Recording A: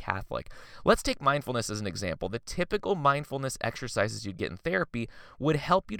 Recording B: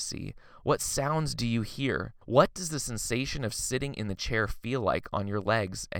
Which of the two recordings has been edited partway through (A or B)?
B